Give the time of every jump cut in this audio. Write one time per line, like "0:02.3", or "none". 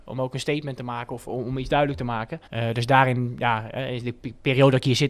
0:02.5